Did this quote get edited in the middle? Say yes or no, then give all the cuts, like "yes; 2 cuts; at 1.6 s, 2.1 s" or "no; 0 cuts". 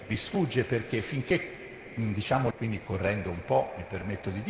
yes; 1 cut; at 2.5 s